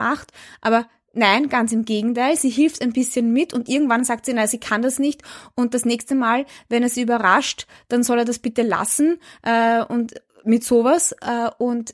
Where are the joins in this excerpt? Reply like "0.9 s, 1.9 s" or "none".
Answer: none